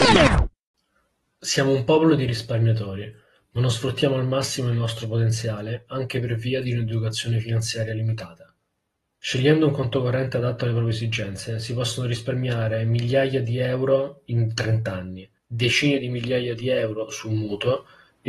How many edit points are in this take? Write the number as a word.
two